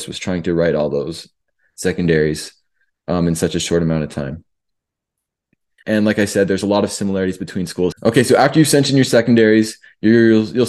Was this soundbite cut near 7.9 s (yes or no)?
yes